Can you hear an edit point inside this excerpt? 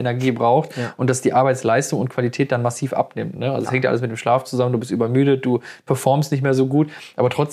no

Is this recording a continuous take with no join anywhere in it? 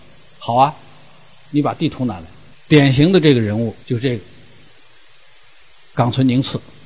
no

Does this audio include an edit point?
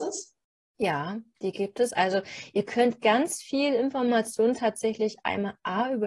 no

